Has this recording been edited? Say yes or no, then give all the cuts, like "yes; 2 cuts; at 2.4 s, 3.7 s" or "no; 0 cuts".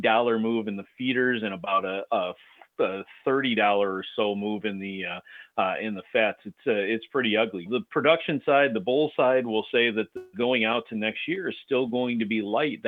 yes; 2 cuts; at 7.7 s, 10.3 s